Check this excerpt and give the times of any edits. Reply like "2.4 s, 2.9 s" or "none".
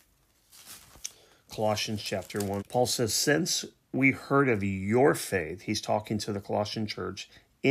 2.6 s